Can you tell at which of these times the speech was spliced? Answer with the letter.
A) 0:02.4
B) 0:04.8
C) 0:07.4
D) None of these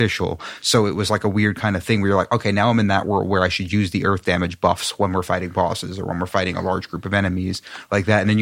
D